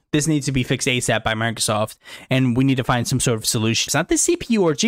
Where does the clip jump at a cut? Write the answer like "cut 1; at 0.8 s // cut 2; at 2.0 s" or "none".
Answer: cut 1; at 3.9 s